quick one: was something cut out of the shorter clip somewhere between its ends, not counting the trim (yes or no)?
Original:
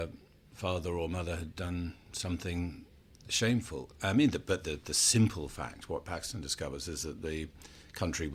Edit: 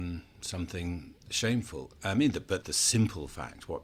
yes